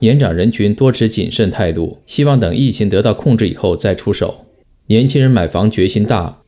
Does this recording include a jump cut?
yes; 1 cut; at 2.0 s

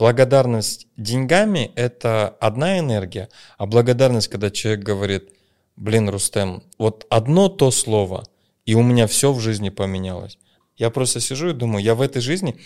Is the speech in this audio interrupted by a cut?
yes; 2 cuts; at 6.7 s, 10.6 s

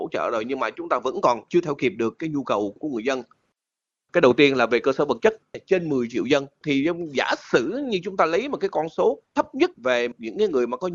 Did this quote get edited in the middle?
no; 0 cuts

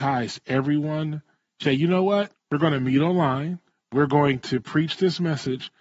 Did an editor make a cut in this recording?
yes; 1 cut; at 1.6 s

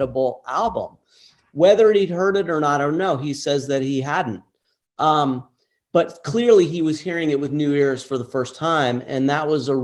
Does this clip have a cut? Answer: no; 0 cuts

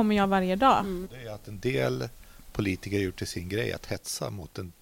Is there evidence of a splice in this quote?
yes; 1 cut; at 1.0 s

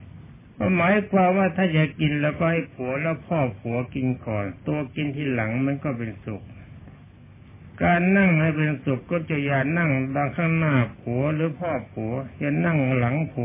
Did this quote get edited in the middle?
no; 0 cuts

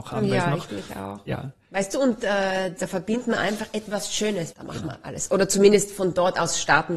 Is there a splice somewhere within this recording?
yes; 2 cuts; at 2.8 s, 4.5 s

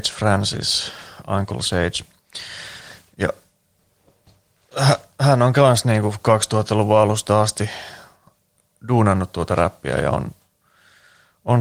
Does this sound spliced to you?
no; 0 cuts

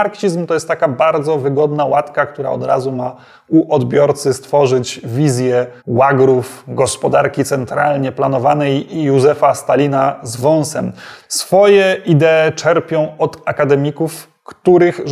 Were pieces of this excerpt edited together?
yes; 2 cuts; at 5.8 s, 11.2 s

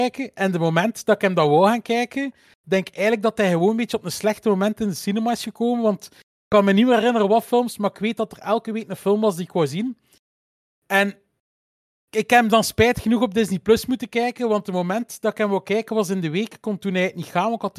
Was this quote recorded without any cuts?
yes; 0 cuts

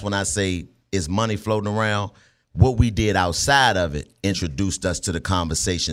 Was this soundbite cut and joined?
no; 0 cuts

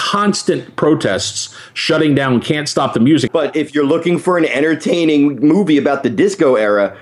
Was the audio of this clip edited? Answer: yes; 1 cut; at 3.3 s

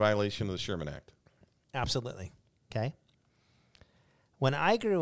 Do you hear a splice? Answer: yes; 1 cut; at 2.5 s

